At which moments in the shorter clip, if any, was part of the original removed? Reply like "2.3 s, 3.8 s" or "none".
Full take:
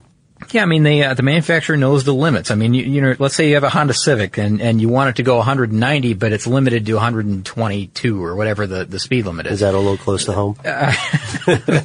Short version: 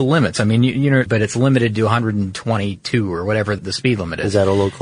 1.1 s, 3.6 s